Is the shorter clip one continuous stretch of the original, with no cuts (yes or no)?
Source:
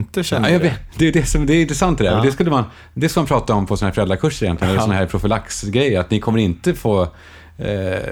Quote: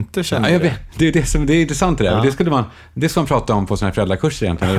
yes